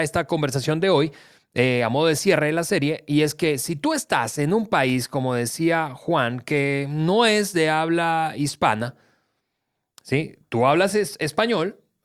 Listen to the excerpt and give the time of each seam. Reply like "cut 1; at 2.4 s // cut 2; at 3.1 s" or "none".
none